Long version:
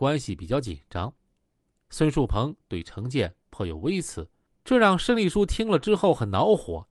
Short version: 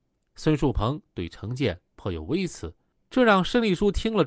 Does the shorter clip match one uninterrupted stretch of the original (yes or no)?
yes